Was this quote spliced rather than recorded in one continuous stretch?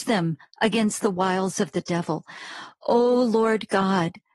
no; 0 cuts

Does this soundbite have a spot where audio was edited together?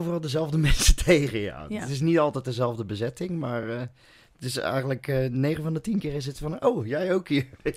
no; 0 cuts

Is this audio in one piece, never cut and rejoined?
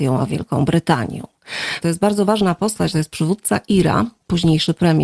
no; 2 cuts; at 1.8 s, 2.9 s

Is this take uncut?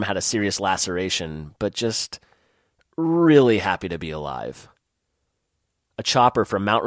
no; 1 cut; at 5.9 s

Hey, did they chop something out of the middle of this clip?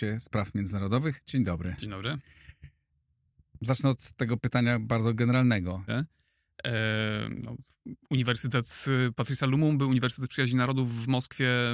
yes; 1 cut; at 5.9 s

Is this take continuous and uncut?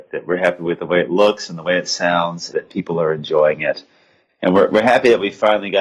no; 1 cut; at 2.5 s

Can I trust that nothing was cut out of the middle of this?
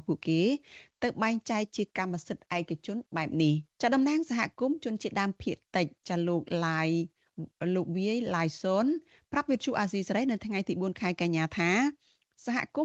no; 1 cut; at 3.7 s

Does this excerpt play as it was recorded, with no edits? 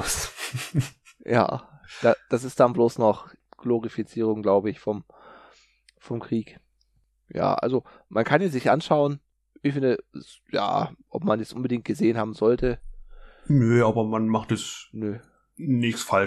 yes; 0 cuts

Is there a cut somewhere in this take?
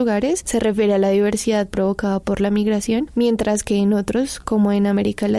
no; 0 cuts

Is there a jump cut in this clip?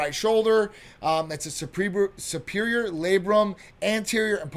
no; 0 cuts

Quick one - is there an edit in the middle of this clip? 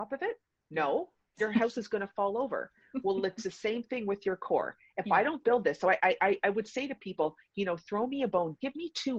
no; 0 cuts

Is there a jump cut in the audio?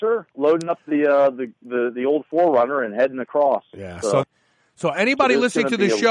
yes; 1 cut; at 4.2 s

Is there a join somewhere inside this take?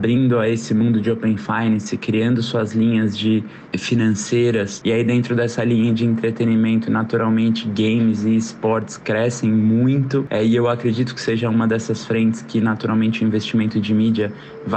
yes; 1 cut; at 4.8 s

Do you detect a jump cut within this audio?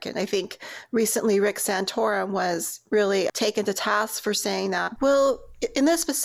yes; 2 cuts; at 3.3 s, 5.0 s

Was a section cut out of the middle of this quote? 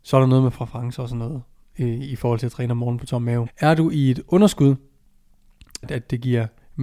yes; 2 cuts; at 3.5 s, 5.8 s

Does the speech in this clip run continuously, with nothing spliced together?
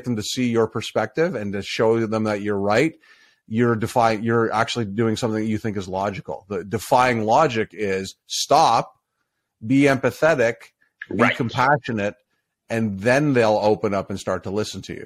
yes; 0 cuts

